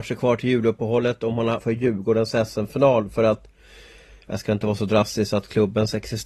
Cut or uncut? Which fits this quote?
cut